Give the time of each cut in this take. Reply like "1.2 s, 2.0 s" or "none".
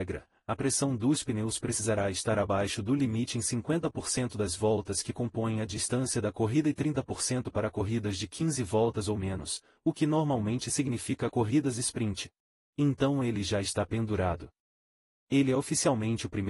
12.7 s